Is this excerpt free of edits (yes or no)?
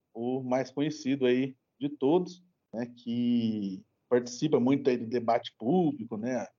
yes